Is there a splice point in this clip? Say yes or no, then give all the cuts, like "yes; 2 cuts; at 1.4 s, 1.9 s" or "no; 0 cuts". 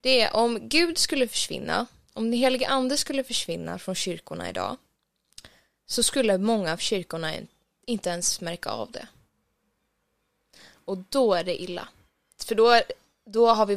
yes; 1 cut; at 12.3 s